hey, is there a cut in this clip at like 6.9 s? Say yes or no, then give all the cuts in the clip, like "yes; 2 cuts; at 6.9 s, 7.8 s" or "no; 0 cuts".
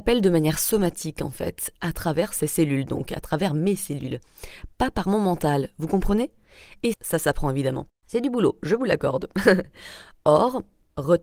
yes; 1 cut; at 6.9 s